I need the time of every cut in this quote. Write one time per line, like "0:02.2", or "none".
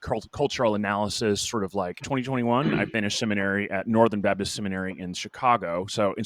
0:02.0